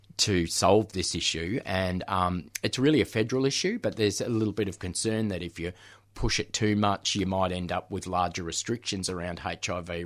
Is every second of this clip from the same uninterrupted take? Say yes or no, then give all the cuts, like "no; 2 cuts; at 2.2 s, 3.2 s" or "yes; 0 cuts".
yes; 0 cuts